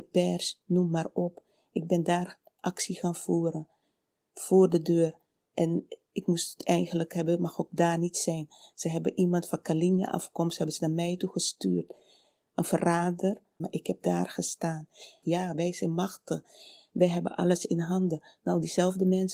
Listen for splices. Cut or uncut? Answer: cut